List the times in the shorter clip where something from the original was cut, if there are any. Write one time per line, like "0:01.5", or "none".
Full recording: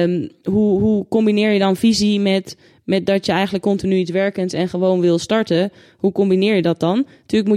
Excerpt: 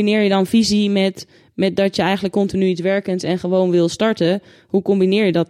none